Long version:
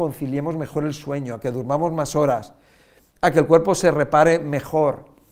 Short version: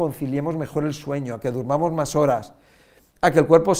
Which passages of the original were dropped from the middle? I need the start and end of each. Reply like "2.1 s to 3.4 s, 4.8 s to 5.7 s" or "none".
none